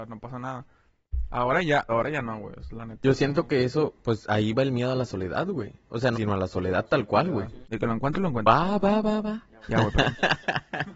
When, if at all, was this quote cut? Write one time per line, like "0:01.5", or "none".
0:01.9
0:06.1
0:07.6